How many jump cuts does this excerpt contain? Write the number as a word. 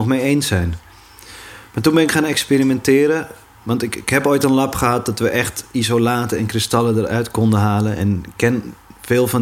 zero